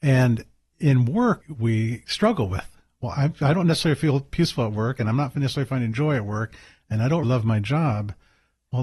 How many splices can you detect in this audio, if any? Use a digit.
2